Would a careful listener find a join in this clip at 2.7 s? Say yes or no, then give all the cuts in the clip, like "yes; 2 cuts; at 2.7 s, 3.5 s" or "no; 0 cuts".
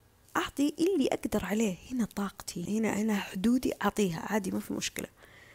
yes; 1 cut; at 2.7 s